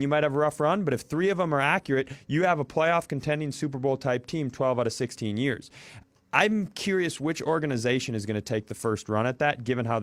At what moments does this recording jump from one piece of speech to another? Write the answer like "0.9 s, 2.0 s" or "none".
none